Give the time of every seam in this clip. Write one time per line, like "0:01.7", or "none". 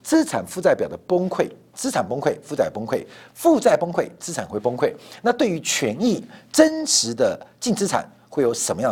0:01.7